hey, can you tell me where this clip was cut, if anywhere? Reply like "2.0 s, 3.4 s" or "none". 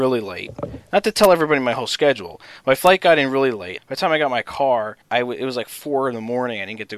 3.8 s, 5.0 s